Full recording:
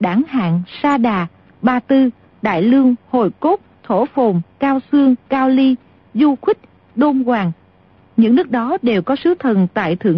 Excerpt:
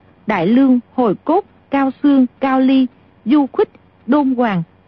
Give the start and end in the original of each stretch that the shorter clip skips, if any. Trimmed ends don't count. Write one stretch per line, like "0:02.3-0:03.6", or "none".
0:03.8-0:04.5